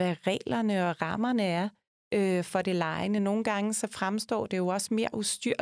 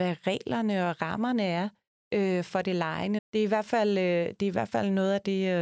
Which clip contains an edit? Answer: second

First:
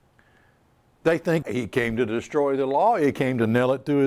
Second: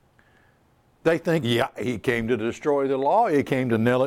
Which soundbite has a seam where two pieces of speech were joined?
first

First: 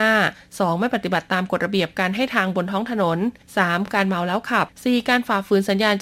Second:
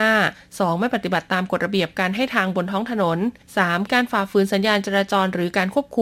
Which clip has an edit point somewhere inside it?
second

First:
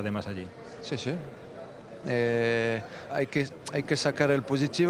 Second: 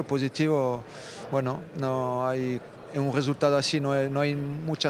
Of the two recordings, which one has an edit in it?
first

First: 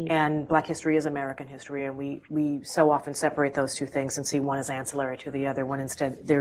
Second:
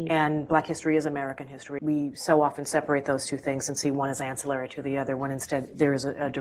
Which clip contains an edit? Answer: second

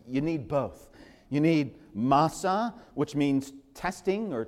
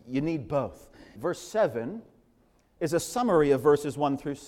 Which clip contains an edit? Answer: second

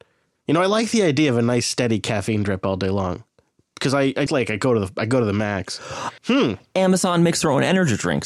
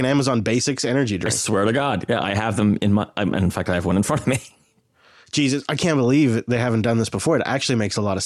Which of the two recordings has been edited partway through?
first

